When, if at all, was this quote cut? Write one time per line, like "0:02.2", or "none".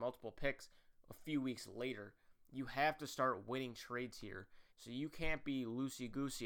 0:04.7